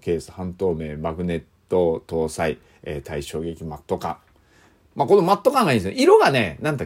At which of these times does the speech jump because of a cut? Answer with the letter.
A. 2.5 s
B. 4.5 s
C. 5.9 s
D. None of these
D